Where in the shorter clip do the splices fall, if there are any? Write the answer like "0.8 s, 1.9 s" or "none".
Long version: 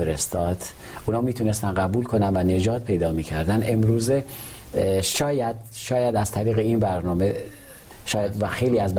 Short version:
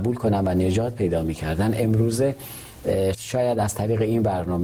3.1 s